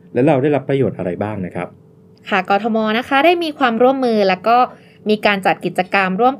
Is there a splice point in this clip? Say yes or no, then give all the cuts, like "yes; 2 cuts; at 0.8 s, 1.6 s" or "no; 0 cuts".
no; 0 cuts